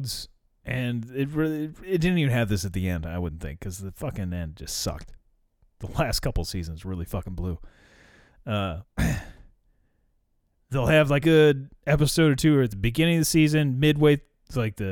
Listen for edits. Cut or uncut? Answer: cut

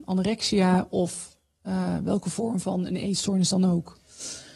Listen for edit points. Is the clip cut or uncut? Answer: uncut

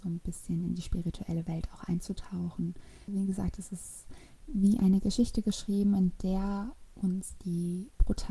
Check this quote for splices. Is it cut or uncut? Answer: cut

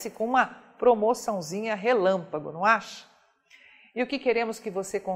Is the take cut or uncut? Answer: uncut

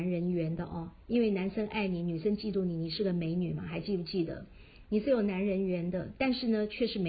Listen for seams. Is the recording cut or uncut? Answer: uncut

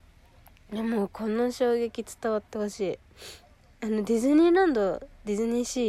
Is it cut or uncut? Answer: uncut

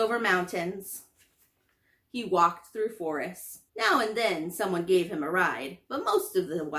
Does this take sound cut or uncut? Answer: cut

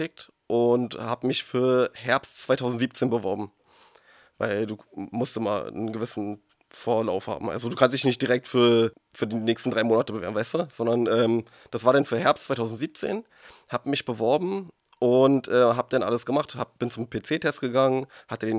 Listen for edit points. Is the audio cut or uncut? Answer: uncut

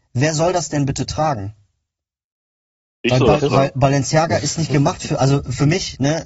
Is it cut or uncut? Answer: uncut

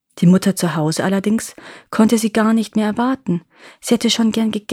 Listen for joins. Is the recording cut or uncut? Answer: uncut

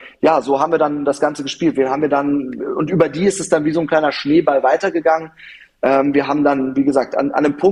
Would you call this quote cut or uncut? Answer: uncut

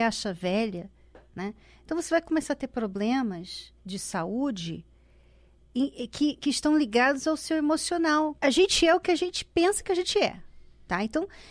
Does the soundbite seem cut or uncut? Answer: cut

